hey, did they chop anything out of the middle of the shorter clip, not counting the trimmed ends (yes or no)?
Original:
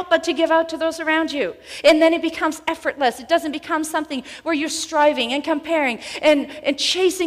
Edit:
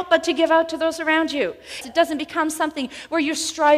yes